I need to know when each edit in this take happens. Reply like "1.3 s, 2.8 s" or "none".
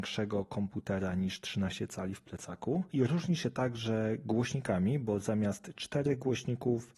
2.9 s